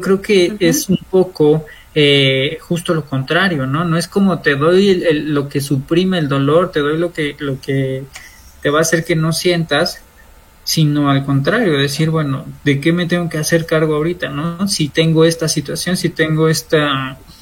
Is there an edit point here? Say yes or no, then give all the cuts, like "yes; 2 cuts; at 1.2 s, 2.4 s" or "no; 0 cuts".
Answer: no; 0 cuts